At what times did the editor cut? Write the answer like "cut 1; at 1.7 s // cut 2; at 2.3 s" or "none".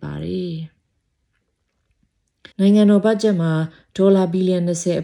cut 1; at 2.5 s